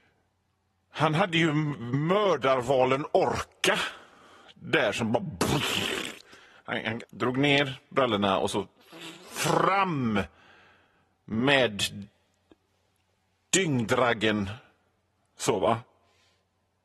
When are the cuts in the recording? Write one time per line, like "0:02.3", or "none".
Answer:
0:07.0